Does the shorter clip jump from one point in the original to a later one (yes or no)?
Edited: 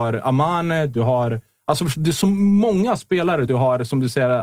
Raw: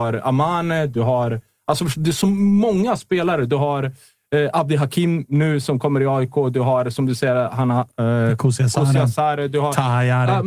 yes